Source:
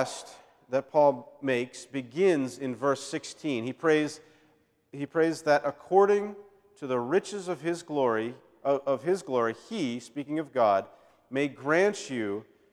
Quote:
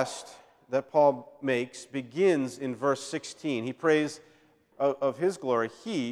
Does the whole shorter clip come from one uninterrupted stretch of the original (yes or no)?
no